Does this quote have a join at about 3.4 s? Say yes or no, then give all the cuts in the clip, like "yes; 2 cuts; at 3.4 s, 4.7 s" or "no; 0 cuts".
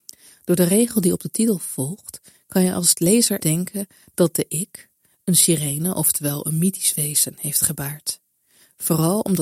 yes; 1 cut; at 3.4 s